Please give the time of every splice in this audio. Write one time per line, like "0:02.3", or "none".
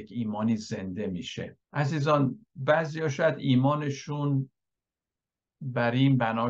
0:01.6